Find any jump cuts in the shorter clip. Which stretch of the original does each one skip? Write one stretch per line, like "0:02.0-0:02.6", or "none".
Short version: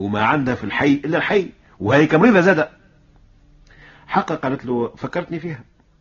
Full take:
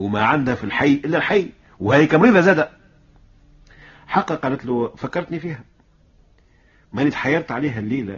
none